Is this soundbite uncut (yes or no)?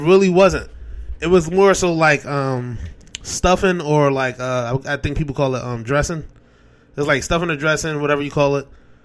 yes